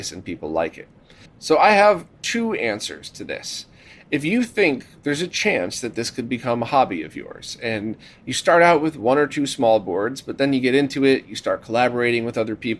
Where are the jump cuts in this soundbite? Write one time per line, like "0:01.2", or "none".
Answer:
0:01.3

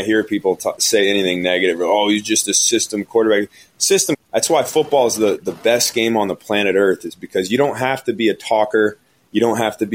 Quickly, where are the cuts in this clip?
0:04.1

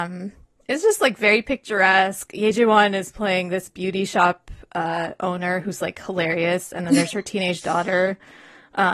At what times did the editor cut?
none

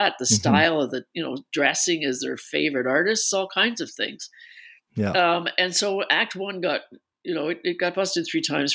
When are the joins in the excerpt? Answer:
none

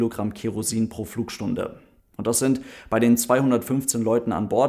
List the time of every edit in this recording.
0:02.0

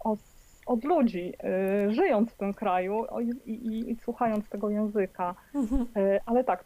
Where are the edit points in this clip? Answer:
none

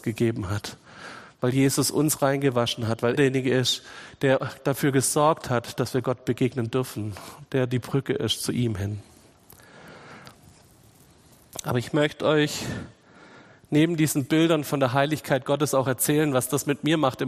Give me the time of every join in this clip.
0:03.2

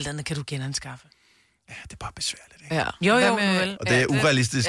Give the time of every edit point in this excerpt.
0:03.8

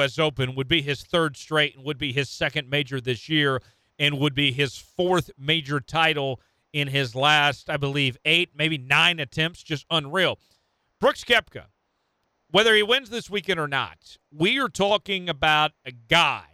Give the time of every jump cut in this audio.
none

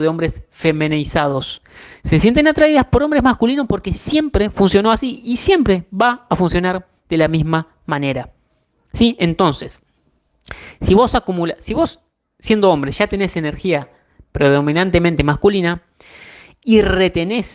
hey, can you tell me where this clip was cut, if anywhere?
none

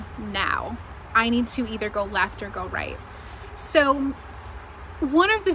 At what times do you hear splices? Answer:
none

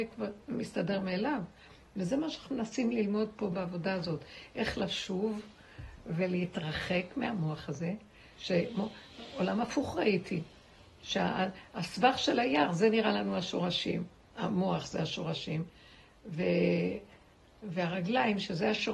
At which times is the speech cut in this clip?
none

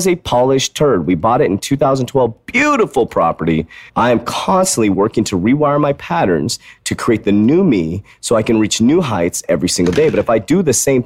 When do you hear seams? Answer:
0:03.9

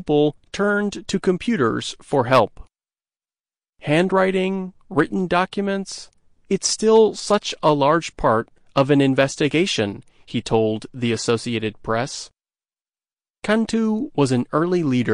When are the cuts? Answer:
0:03.7

